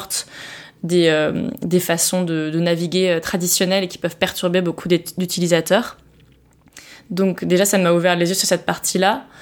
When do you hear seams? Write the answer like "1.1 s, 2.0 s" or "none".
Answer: none